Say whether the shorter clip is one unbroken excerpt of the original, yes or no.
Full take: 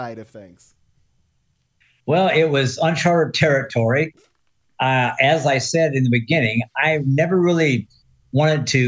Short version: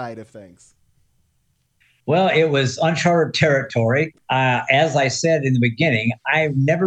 no